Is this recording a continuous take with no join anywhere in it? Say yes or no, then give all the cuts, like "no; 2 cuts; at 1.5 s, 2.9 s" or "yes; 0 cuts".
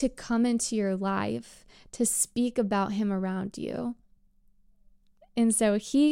yes; 0 cuts